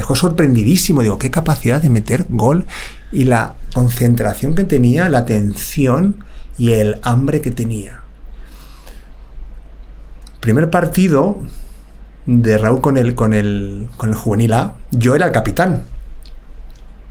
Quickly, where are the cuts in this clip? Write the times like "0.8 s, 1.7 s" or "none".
none